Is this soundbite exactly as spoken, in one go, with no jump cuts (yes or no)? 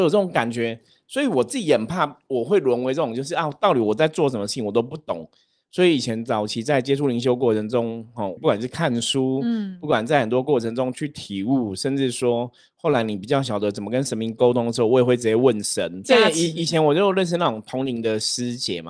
no